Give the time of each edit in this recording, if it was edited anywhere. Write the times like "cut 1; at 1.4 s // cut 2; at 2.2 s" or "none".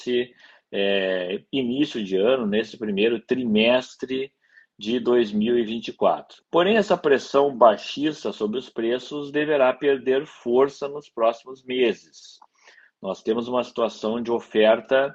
cut 1; at 6.4 s